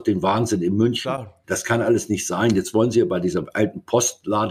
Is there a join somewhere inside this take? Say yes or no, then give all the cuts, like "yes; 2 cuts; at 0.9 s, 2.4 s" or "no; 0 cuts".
yes; 1 cut; at 1.4 s